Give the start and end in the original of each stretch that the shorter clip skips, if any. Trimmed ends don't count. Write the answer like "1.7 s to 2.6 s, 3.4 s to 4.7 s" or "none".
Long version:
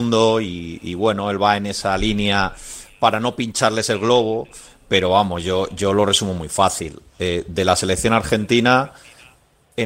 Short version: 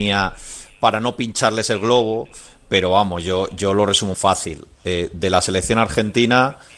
6.3 s to 6.5 s